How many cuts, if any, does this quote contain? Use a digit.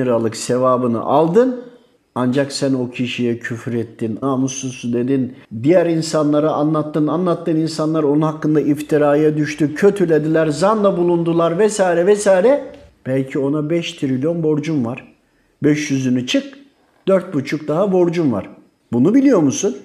1